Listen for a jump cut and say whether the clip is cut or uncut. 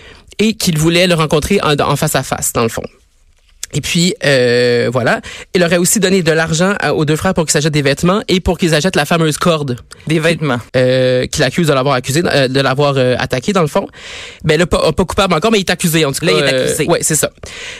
cut